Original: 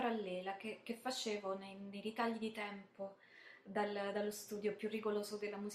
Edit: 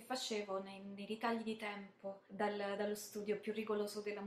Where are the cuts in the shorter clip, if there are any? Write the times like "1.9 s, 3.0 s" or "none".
2.3 s